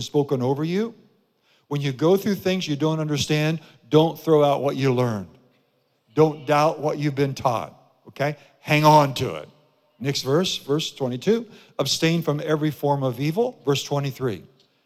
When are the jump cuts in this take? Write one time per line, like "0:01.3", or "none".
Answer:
none

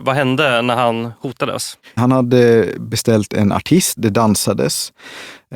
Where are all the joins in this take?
0:02.0
0:04.0

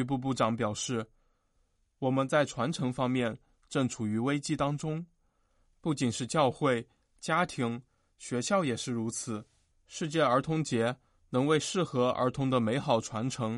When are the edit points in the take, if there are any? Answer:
none

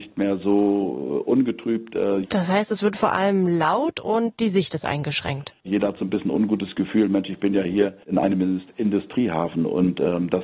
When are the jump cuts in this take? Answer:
0:02.2
0:05.7
0:08.0

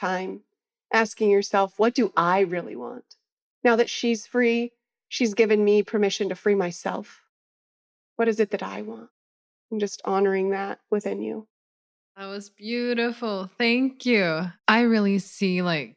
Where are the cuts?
0:14.6

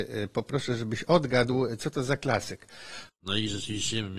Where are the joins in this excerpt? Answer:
0:03.1

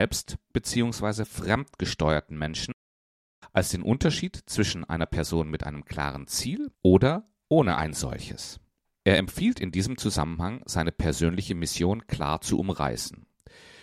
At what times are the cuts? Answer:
0:06.7

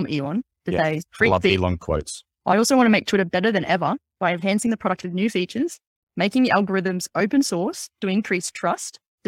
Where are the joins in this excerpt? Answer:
0:02.3

